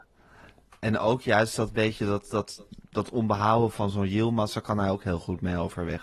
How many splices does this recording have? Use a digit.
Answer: 0